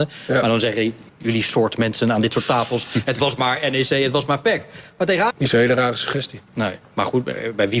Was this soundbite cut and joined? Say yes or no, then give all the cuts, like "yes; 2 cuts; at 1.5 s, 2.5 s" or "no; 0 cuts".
yes; 2 cuts; at 1.1 s, 5.3 s